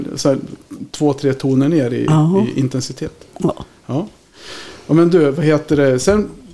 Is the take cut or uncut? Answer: uncut